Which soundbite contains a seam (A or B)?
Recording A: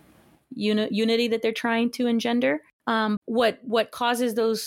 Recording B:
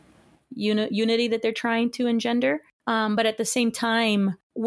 A